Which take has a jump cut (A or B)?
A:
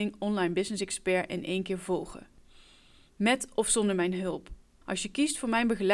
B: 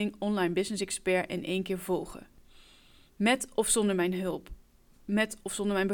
A